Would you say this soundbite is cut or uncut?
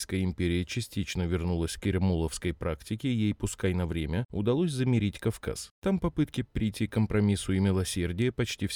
uncut